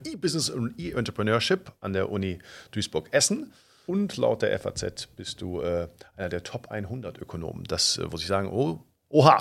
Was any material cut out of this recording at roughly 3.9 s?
yes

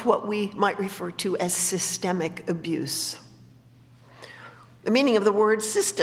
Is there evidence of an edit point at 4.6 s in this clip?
no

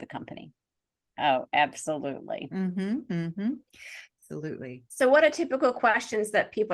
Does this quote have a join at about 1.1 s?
yes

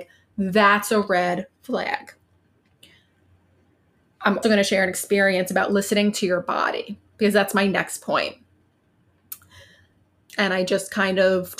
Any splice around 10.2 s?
yes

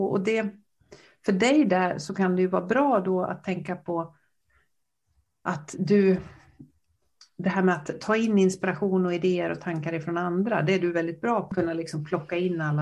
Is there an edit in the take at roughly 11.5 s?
yes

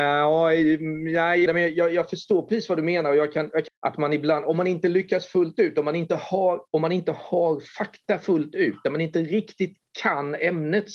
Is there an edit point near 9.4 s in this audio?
no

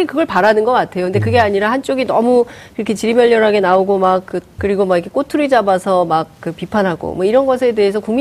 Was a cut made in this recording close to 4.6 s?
yes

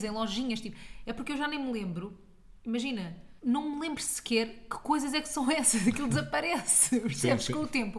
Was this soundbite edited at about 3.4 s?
yes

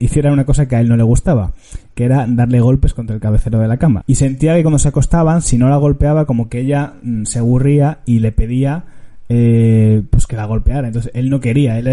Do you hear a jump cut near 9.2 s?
no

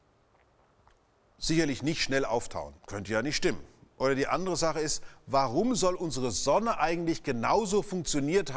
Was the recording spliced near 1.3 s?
no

